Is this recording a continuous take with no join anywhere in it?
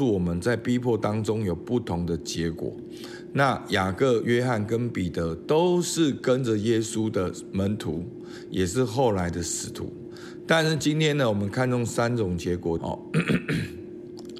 no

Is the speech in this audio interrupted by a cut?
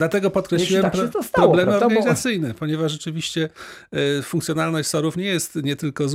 no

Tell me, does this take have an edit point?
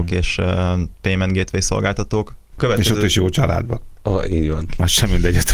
yes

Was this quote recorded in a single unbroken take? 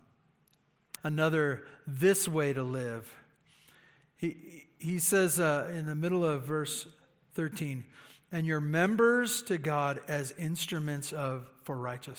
no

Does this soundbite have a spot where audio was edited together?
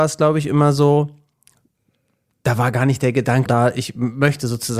yes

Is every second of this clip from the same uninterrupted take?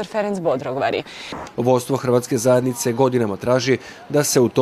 no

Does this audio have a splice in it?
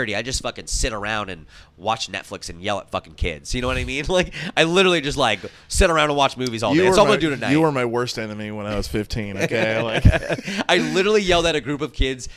no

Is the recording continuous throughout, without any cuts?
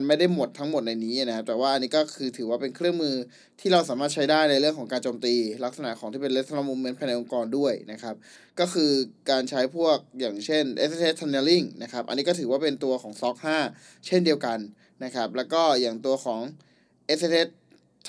yes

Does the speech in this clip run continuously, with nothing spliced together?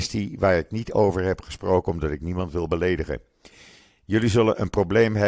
yes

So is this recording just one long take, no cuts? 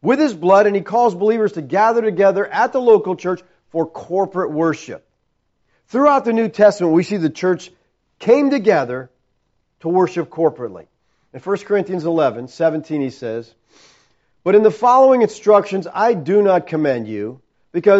yes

